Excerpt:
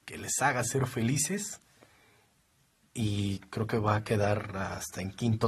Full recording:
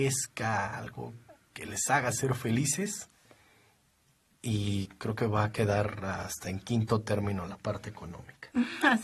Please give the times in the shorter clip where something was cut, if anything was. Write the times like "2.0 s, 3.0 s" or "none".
none

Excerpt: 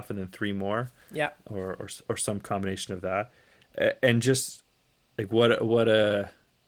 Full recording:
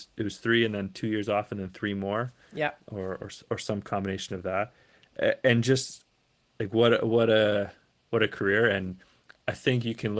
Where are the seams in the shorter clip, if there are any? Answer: none

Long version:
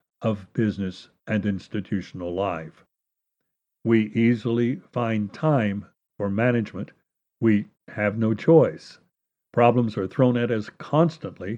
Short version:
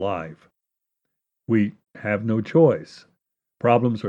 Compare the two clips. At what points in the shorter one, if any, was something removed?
1.4 s

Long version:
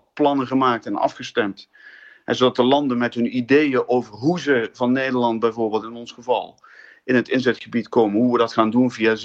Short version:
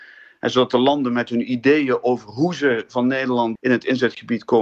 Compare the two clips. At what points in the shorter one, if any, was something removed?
3.6 s

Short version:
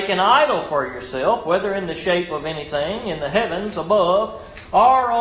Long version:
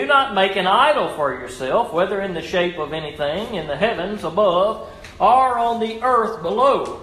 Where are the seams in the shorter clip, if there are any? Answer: none

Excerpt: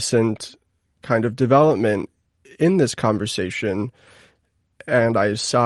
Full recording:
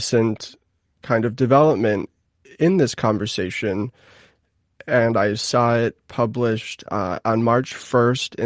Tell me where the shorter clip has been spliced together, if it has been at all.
none

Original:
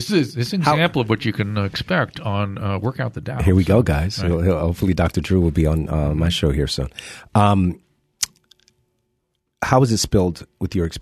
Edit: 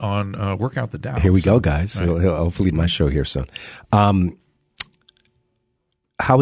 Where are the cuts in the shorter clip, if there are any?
2.7 s

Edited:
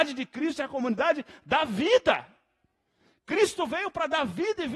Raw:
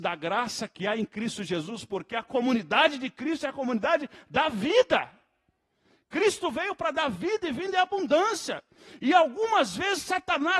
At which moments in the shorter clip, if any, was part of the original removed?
none

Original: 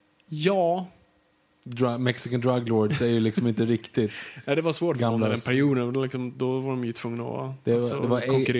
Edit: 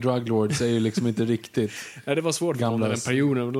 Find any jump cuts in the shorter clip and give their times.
none

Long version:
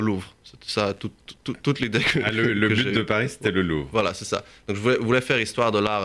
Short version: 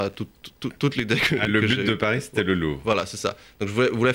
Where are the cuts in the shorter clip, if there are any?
1.5 s

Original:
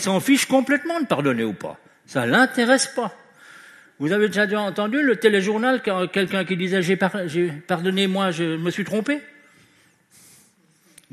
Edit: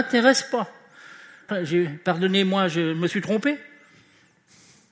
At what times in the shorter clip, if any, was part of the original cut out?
1.5 s

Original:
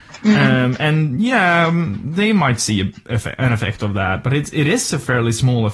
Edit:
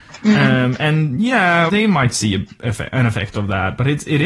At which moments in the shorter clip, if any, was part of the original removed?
1.7 s

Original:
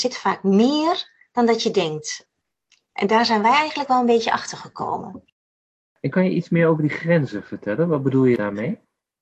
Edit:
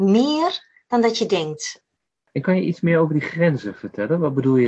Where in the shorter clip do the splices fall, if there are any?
2.2 s

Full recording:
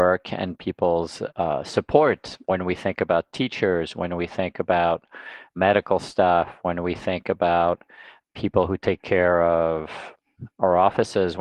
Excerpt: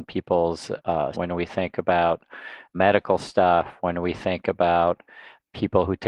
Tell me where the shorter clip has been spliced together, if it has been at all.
1.1 s

